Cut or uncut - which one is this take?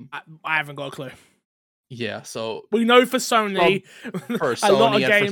uncut